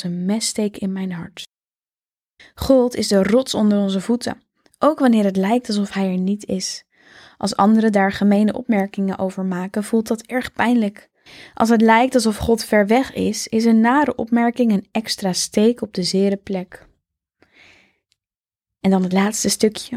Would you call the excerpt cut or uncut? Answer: uncut